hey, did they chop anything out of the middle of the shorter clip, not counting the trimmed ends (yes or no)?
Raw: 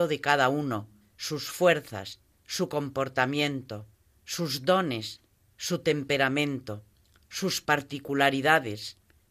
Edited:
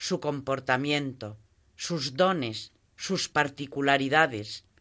yes